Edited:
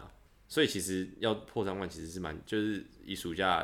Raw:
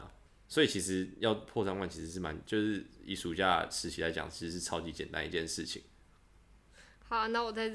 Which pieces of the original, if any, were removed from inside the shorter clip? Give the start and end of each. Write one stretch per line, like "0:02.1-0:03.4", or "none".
none